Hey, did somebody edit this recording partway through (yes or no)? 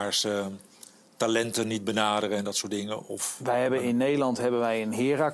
no